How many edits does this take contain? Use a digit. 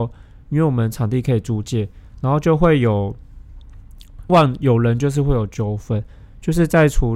1